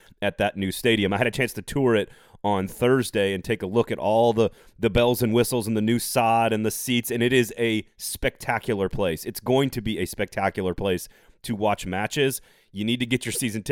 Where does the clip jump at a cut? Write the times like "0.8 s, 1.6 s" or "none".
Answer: none